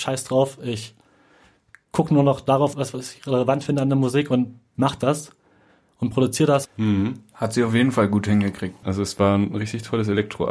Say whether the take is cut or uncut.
cut